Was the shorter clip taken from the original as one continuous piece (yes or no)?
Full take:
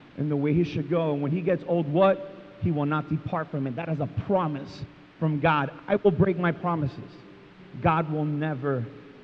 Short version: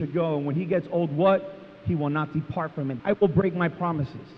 no